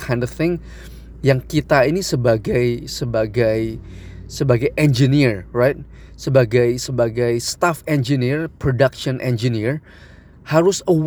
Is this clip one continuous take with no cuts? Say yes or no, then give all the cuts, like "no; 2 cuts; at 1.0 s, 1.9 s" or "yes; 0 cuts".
yes; 0 cuts